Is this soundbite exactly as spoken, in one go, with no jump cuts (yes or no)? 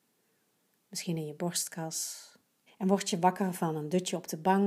no